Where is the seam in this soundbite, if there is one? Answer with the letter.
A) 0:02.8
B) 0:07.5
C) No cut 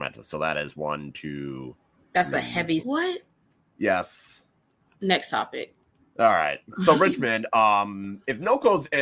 A